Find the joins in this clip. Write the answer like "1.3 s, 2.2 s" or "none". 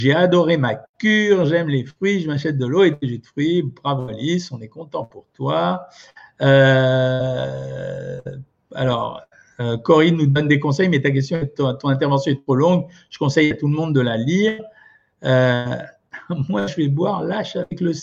none